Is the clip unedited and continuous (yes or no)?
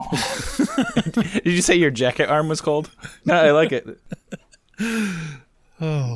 no